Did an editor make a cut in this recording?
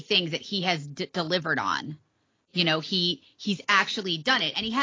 no; 0 cuts

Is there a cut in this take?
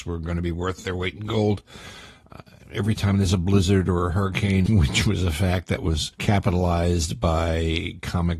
yes; 2 cuts; at 4.7 s, 6.1 s

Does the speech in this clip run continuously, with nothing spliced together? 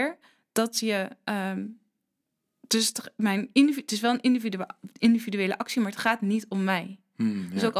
yes; 0 cuts

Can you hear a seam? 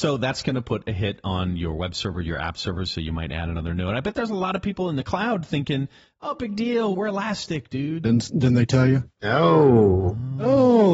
yes; 3 cuts; at 6.9 s, 8.0 s, 9.2 s

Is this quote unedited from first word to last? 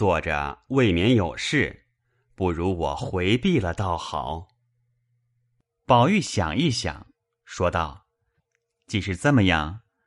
yes; 0 cuts

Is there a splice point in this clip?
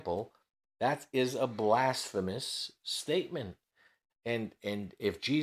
yes; 1 cut; at 4.1 s

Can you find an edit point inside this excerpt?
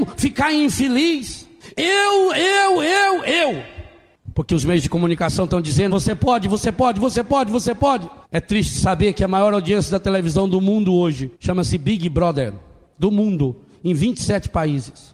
yes; 3 cuts; at 5.9 s, 8.2 s, 11.3 s

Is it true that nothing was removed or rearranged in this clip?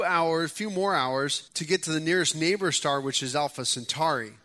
no; 1 cut; at 1.5 s

